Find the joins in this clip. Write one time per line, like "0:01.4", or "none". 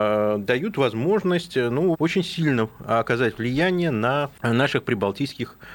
0:01.9